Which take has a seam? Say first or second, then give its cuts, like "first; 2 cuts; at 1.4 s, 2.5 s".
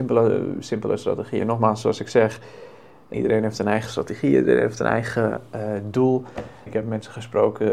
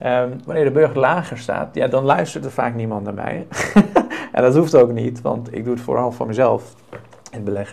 first; 2 cuts; at 3.1 s, 6.7 s